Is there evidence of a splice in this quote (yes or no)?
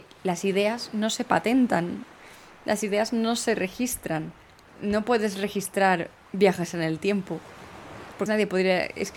yes